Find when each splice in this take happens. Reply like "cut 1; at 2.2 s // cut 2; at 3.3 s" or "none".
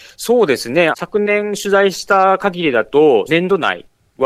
cut 1; at 0.9 s // cut 2; at 3.3 s